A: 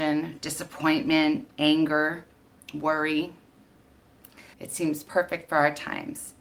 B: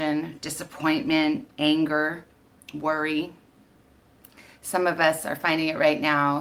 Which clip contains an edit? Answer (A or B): A